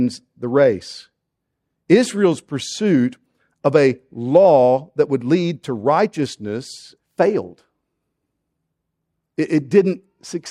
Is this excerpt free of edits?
no; 1 cut; at 7.0 s

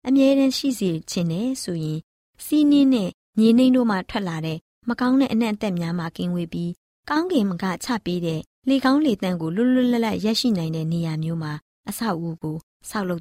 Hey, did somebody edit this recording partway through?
no; 0 cuts

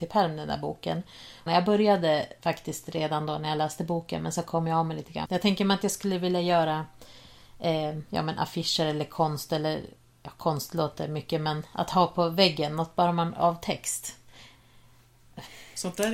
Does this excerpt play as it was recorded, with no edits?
no; 2 cuts; at 1.5 s, 5.3 s

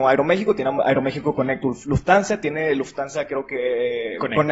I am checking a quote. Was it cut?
no; 0 cuts

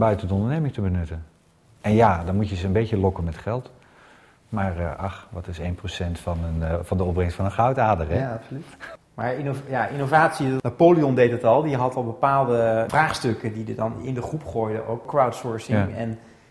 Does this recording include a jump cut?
no; 0 cuts

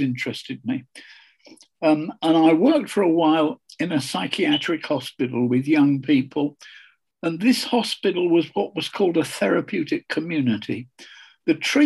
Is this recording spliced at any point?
no; 0 cuts

